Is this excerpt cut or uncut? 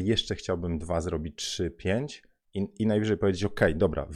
uncut